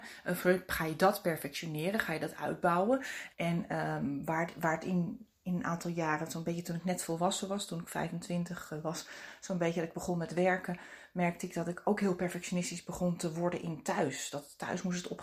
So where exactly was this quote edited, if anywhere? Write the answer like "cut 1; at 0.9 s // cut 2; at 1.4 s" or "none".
cut 1; at 3.3 s